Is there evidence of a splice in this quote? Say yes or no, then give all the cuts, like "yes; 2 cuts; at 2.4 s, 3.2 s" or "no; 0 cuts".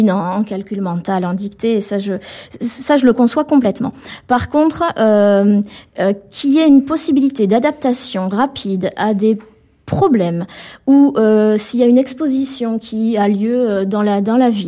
no; 0 cuts